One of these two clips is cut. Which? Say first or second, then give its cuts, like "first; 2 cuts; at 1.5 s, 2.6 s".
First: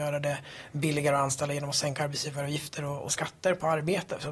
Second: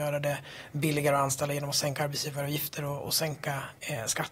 first; 1 cut; at 3.1 s